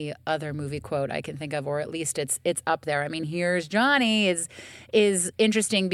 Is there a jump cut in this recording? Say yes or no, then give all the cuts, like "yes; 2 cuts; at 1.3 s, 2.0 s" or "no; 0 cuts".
no; 0 cuts